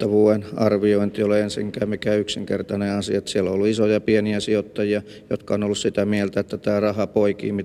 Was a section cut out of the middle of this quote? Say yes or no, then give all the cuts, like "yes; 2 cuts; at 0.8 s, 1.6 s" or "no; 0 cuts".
no; 0 cuts